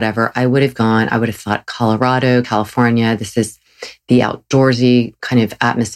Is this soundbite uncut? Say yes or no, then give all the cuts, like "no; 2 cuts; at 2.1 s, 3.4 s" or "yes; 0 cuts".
yes; 0 cuts